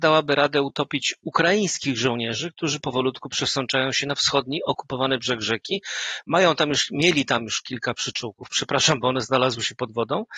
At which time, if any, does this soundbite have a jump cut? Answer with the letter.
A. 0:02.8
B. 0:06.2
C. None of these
A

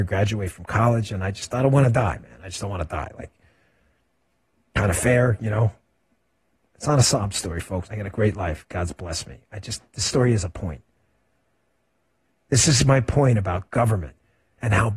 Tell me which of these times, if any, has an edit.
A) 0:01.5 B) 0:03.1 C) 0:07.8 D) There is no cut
C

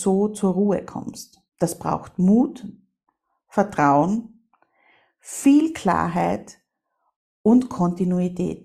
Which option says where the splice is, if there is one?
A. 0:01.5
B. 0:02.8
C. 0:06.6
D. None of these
A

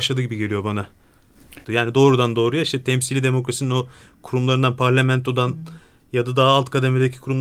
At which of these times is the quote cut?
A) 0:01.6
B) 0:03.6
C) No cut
A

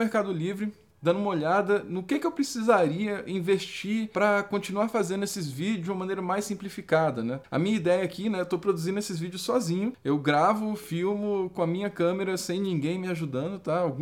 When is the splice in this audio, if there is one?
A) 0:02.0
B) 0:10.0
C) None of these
C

